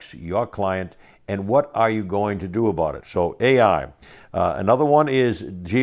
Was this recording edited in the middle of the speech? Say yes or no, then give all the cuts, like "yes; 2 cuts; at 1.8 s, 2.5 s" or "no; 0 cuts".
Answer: yes; 1 cut; at 3.0 s